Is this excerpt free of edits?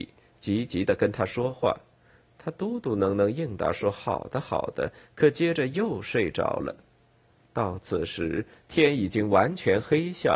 yes; 0 cuts

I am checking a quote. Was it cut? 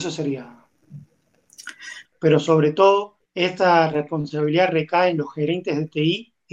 yes; 2 cuts; at 2.0 s, 3.2 s

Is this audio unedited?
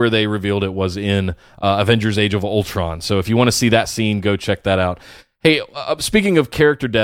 yes; 0 cuts

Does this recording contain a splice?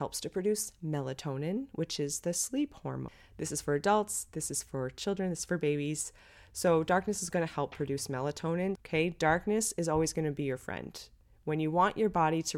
yes; 1 cut; at 8.8 s

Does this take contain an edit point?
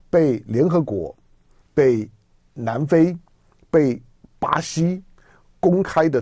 yes; 1 cut; at 1.6 s

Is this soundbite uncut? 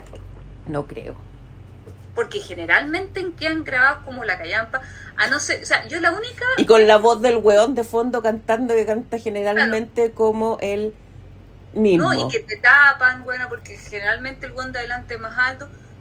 yes; 0 cuts

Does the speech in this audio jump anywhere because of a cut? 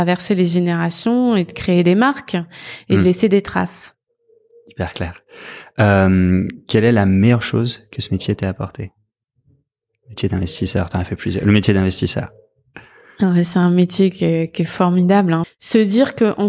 yes; 1 cut; at 15.4 s

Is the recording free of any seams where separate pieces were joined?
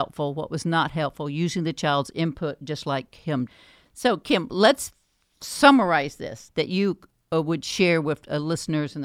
no; 1 cut; at 6.5 s

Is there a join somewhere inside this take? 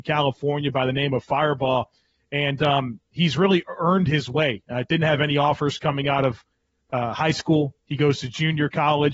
no; 0 cuts

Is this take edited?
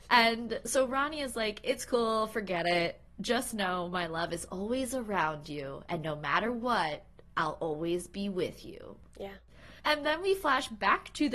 no; 0 cuts

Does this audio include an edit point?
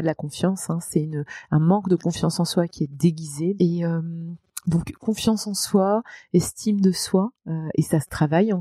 yes; 1 cut; at 3.6 s

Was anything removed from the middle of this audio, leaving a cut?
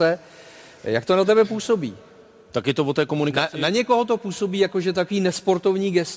no; 0 cuts

